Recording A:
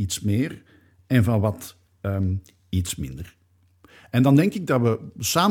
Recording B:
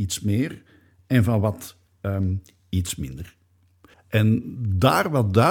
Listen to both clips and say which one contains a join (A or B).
B